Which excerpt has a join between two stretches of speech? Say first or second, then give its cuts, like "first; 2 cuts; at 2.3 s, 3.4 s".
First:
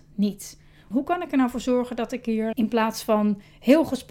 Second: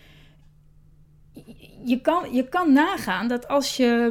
first; 2 cuts; at 0.9 s, 2.5 s